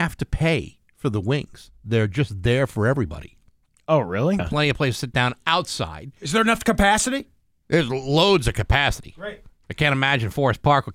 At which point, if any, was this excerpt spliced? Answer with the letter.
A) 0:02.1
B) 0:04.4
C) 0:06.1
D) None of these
B